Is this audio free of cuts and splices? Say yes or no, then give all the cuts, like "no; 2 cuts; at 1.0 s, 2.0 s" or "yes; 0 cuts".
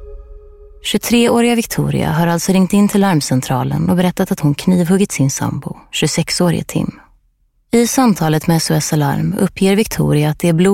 no; 1 cut; at 7.7 s